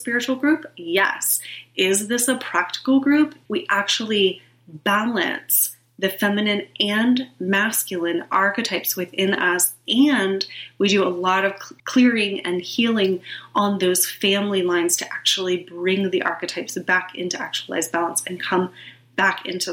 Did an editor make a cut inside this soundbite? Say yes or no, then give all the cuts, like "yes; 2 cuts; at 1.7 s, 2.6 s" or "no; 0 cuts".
yes; 2 cuts; at 3.5 s, 11.8 s